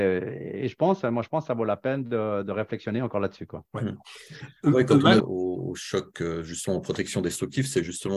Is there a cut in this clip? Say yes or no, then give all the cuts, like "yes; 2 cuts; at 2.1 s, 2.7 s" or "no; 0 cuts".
yes; 2 cuts; at 3.7 s, 5.2 s